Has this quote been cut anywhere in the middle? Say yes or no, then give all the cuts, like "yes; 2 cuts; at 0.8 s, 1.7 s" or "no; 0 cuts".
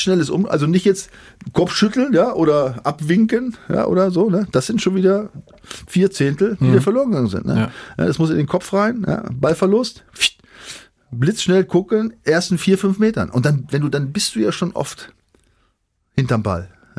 no; 0 cuts